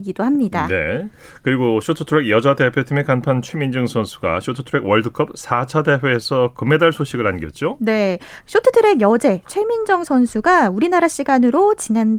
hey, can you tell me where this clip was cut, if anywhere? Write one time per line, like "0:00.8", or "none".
none